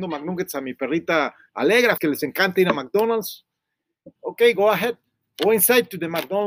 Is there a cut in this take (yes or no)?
yes